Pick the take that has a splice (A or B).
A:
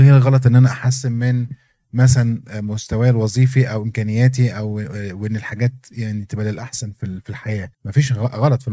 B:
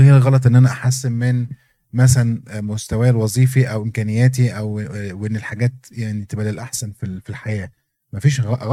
A